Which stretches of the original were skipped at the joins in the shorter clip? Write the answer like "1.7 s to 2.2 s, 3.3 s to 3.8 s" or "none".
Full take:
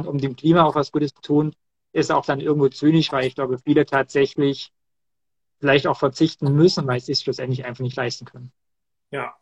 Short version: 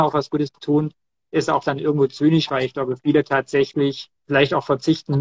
4.8 s to 5.5 s